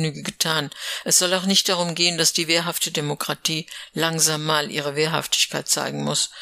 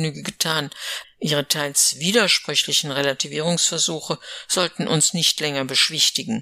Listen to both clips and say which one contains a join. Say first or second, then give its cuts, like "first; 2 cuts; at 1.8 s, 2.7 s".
second; 1 cut; at 1.0 s